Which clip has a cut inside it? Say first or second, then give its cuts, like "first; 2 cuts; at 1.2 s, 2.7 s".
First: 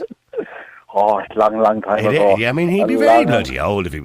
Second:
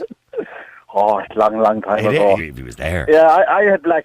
second; 1 cut; at 2.4 s